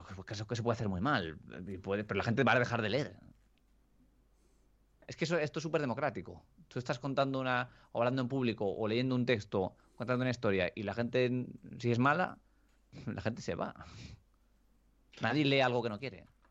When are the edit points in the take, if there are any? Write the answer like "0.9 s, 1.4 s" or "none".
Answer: none

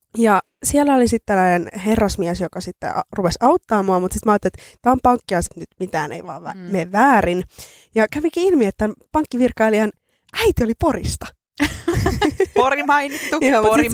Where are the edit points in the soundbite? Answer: 5.5 s

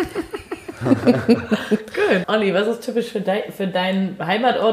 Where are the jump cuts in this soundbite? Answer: 2.2 s

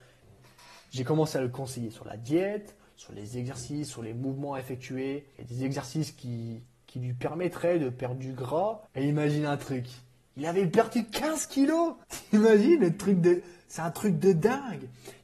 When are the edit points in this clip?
5.3 s, 8.9 s, 12.0 s

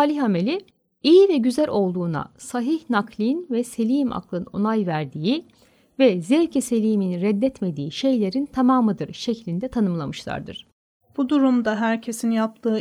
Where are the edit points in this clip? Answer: 11.0 s

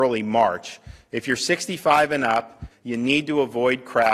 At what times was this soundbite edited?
2.7 s

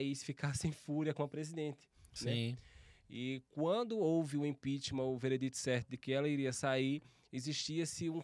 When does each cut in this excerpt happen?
none

